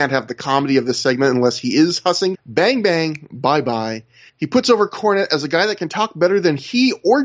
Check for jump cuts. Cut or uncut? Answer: cut